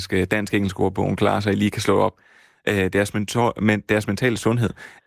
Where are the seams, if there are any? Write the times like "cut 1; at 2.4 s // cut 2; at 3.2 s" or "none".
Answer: cut 1; at 2.5 s